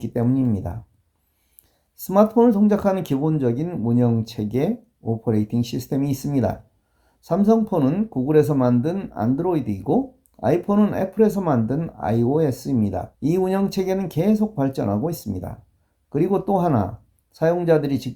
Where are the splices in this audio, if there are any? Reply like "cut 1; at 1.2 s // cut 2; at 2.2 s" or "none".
cut 1; at 13.1 s